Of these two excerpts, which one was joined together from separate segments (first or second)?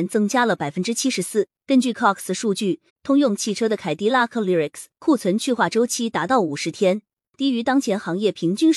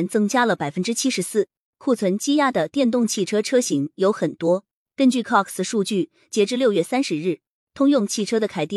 first